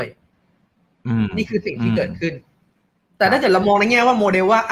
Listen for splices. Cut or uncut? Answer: uncut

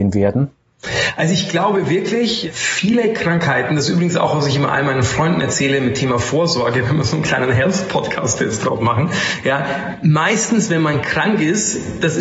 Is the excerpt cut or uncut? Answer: uncut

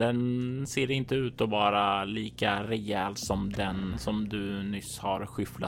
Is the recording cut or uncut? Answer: uncut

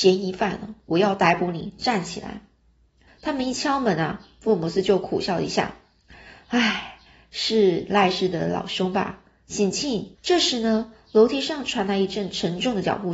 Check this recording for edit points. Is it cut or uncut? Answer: cut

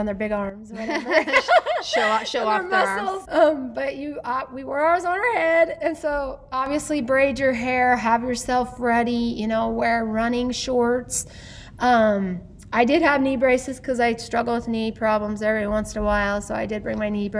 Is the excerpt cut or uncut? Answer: cut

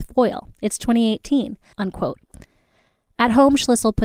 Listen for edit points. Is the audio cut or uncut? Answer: cut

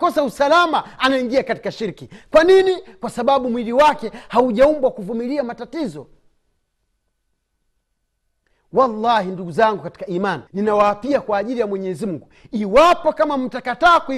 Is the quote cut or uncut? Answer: cut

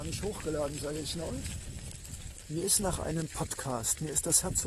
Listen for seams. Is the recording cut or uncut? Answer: uncut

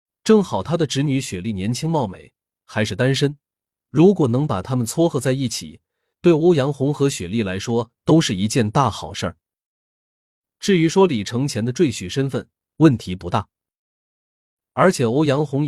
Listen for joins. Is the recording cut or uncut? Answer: uncut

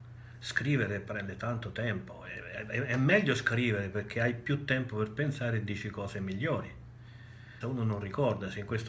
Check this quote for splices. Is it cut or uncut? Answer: cut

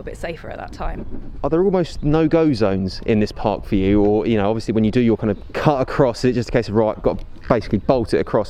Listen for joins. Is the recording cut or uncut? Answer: uncut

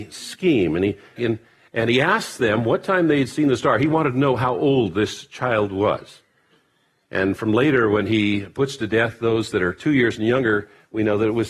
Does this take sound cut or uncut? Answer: cut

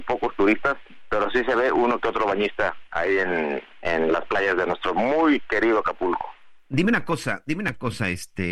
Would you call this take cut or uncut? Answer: cut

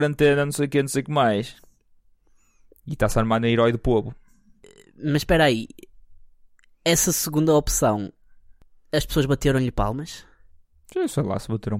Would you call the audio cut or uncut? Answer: uncut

